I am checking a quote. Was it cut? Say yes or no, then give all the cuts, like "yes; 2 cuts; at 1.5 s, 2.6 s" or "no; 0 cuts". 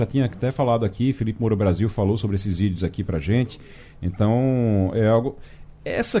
no; 0 cuts